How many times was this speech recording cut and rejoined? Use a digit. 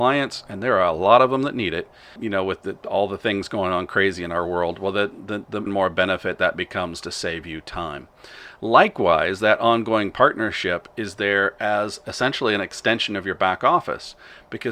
2